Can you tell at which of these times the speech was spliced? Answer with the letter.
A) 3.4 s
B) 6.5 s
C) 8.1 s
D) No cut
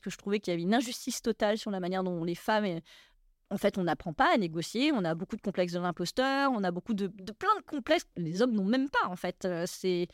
C